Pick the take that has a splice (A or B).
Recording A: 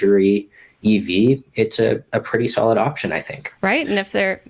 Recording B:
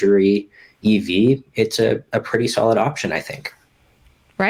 A